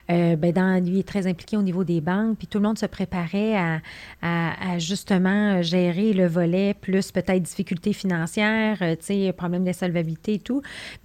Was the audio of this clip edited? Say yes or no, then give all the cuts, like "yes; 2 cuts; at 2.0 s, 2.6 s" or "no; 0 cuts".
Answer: no; 0 cuts